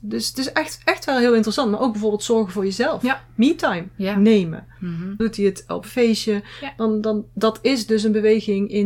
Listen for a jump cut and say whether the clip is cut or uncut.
cut